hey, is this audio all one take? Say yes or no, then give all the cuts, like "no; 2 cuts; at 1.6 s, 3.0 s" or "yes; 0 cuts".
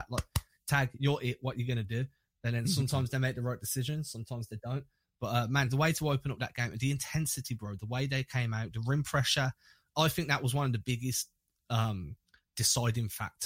yes; 0 cuts